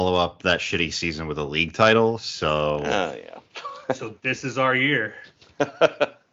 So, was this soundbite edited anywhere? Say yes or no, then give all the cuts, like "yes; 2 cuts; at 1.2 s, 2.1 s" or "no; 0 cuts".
no; 0 cuts